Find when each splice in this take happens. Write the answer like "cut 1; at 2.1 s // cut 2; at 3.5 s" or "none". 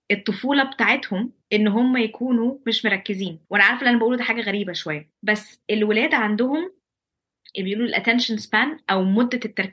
cut 1; at 1.4 s // cut 2; at 3.4 s // cut 3; at 5.1 s